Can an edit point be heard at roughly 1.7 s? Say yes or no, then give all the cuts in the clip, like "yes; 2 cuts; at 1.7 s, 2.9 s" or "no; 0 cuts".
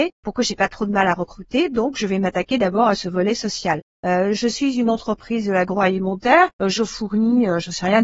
no; 0 cuts